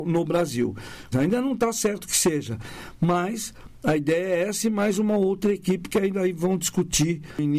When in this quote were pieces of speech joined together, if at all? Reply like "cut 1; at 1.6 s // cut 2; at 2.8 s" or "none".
cut 1; at 1.1 s